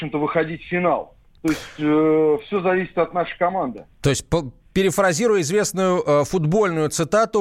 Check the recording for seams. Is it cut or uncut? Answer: uncut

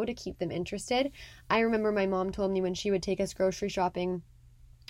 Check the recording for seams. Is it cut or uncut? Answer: uncut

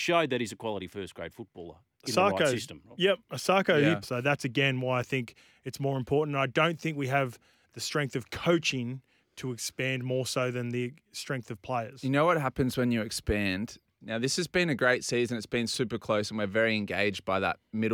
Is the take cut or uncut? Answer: cut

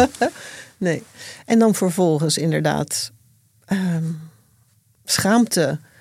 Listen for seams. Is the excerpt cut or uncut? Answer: uncut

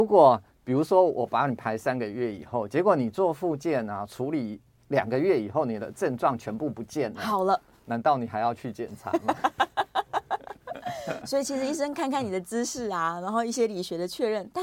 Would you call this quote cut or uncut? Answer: uncut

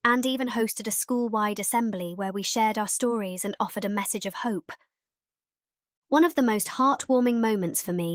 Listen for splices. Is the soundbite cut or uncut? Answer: uncut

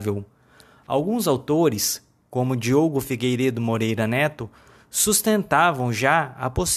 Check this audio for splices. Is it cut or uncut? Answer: uncut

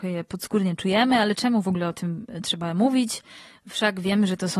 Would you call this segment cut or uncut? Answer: uncut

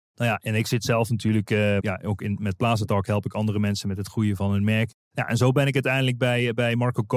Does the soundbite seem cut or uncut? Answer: cut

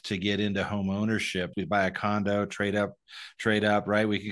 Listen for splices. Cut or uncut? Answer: cut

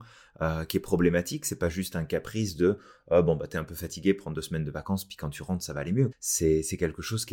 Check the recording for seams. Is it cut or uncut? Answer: cut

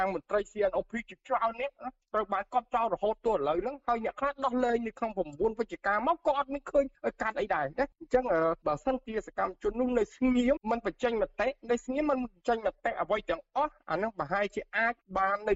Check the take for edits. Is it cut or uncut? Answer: cut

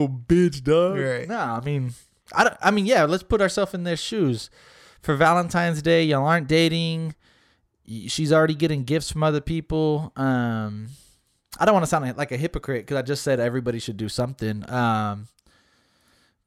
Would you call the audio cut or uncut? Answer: uncut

